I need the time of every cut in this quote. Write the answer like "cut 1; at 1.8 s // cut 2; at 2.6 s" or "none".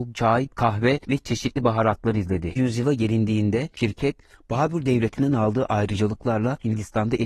cut 1; at 2.6 s